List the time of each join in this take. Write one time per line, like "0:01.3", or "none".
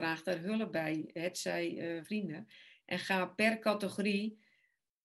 0:02.0